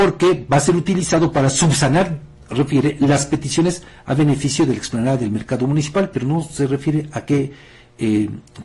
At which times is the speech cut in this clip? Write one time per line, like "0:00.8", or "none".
none